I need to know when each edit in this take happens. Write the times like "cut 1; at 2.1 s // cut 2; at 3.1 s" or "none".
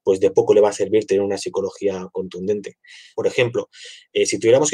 cut 1; at 3.1 s